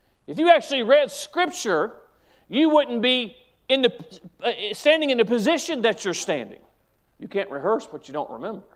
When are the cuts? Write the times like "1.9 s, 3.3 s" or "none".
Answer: 7.0 s